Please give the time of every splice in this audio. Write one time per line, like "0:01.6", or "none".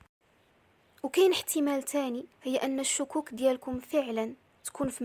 0:02.3